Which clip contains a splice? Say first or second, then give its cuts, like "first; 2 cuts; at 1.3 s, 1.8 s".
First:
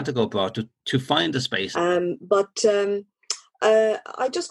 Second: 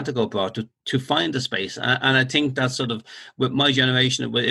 first; 1 cut; at 1.7 s